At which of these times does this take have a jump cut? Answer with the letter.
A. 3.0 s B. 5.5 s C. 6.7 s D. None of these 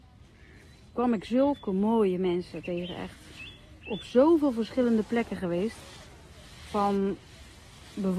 D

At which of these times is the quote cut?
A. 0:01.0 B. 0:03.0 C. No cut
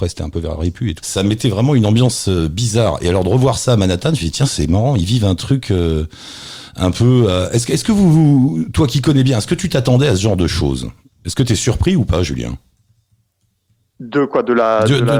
A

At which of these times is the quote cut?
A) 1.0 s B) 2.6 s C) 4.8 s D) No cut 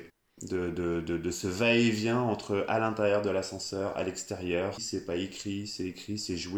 C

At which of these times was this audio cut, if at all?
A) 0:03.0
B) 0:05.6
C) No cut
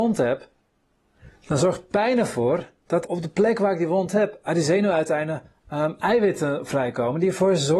A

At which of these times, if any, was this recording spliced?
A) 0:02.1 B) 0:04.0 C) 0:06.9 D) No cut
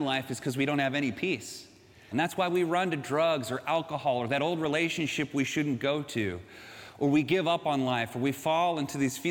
A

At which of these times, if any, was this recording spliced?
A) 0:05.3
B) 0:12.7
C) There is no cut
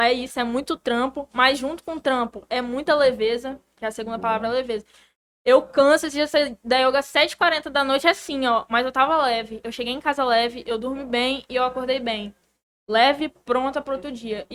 C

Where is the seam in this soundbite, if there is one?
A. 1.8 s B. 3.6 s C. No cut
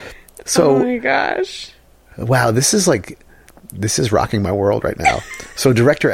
C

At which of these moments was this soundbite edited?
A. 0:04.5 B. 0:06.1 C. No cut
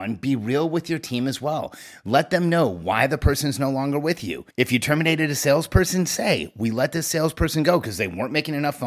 A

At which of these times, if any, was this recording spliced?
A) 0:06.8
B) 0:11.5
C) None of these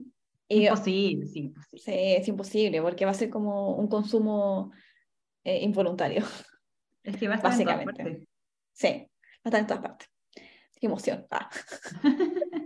C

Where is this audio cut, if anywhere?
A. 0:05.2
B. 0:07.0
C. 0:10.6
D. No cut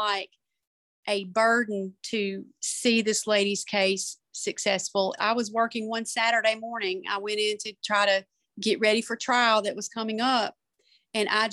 A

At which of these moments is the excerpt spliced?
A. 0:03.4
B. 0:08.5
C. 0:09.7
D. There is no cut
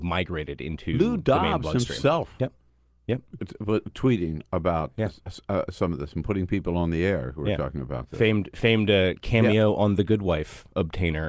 A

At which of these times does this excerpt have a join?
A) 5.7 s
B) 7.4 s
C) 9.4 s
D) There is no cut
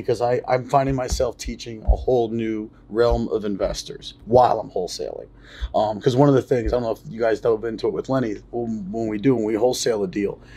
D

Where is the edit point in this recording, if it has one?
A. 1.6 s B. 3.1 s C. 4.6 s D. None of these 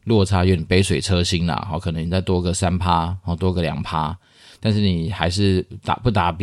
D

